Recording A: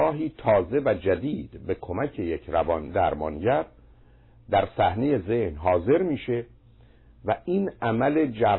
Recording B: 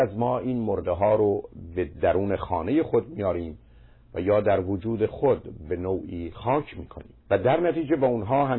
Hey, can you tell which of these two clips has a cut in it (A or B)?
B